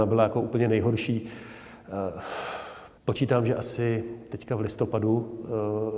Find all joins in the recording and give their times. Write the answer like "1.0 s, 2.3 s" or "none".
3.0 s